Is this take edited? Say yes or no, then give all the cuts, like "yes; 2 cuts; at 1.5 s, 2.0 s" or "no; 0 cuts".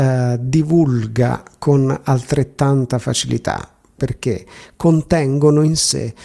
yes; 1 cut; at 4.0 s